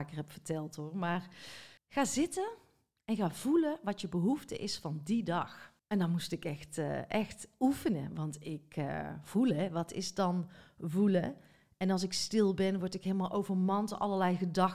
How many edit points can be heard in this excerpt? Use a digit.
2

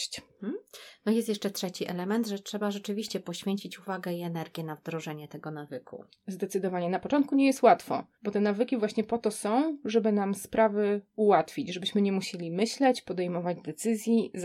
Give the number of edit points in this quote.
1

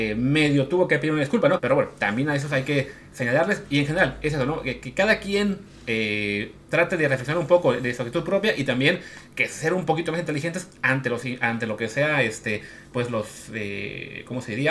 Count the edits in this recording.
1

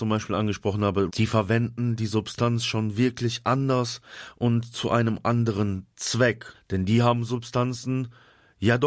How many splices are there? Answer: 2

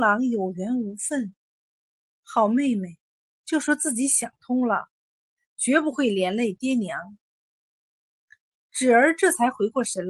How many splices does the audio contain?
1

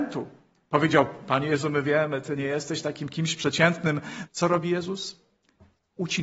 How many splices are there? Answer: 1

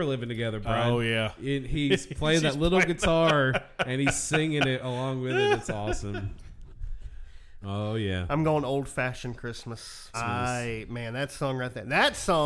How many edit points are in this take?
2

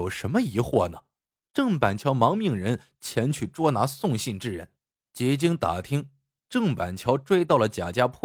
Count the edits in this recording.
2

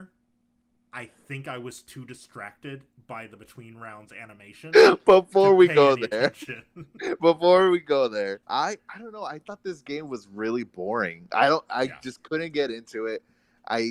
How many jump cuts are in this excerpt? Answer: 1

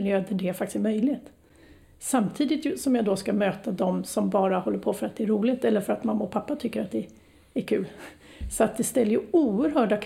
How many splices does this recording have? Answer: 0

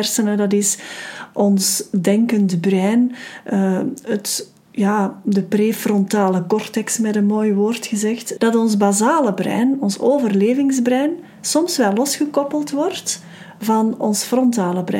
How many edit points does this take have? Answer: 1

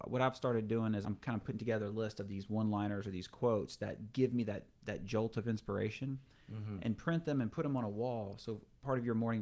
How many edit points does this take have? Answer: 1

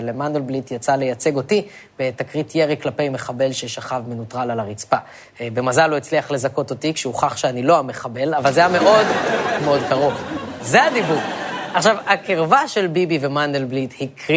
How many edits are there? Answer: 2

